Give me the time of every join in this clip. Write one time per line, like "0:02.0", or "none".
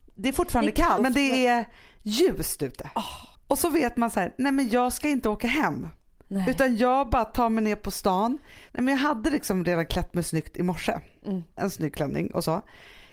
0:01.0
0:03.3